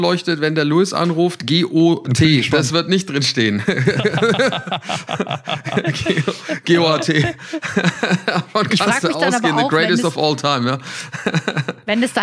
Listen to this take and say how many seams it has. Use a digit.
0